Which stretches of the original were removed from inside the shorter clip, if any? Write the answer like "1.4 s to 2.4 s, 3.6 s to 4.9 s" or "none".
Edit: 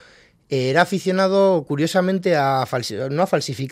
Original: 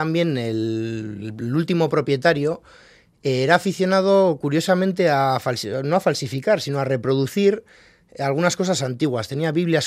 none